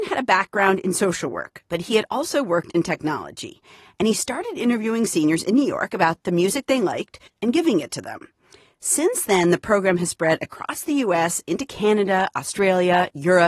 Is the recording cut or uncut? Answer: cut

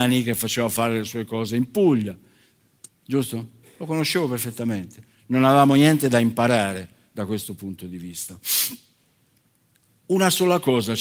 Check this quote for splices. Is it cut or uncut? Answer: cut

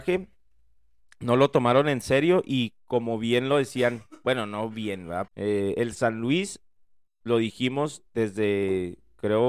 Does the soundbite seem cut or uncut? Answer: cut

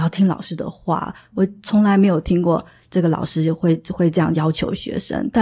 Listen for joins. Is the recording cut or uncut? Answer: uncut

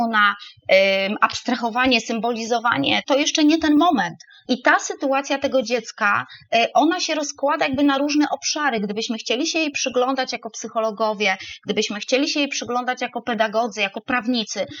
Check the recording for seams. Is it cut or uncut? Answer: cut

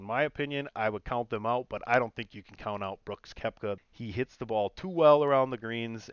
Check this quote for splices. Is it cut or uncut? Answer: cut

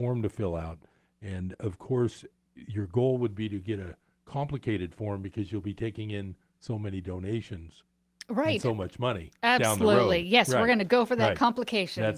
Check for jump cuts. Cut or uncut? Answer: cut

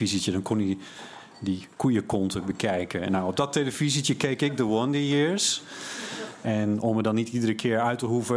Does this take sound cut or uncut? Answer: cut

